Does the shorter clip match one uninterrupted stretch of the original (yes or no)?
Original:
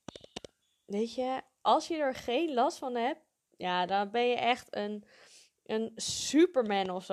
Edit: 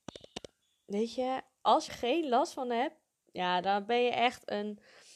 no